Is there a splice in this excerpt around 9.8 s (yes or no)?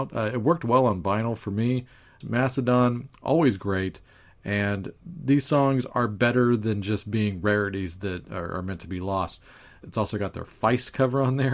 yes